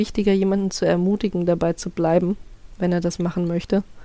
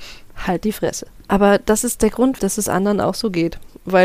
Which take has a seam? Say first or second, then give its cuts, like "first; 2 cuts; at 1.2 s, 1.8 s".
second; 2 cuts; at 1.3 s, 2.4 s